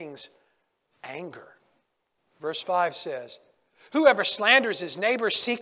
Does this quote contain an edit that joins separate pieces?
yes; 1 cut; at 2.2 s

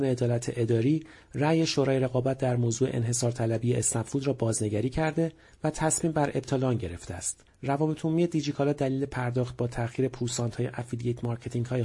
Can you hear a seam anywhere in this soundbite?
yes; 1 cut; at 7.5 s

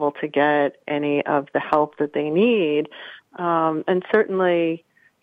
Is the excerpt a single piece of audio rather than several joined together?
no; 1 cut; at 3.2 s

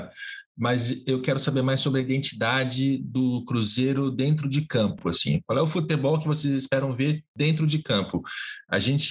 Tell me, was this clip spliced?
no; 0 cuts

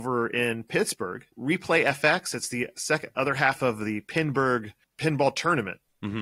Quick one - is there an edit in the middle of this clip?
yes; 1 cut; at 1.3 s

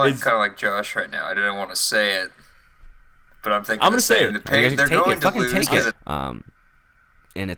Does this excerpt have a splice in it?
yes; 2 cuts; at 4.3 s, 5.9 s

